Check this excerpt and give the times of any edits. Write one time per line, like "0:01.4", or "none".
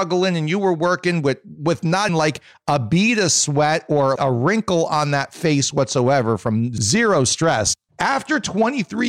0:02.1
0:04.2